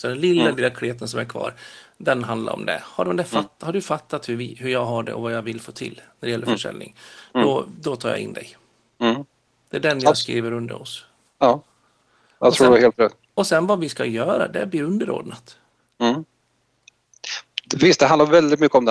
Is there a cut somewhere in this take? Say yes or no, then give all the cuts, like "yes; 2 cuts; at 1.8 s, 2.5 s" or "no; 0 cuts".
no; 0 cuts